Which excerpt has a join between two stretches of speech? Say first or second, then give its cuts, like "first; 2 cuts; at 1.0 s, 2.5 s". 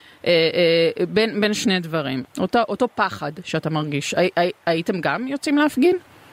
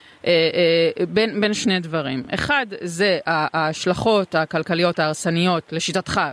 first; 1 cut; at 2.2 s